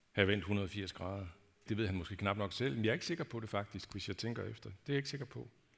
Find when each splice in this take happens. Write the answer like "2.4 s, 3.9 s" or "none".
1.7 s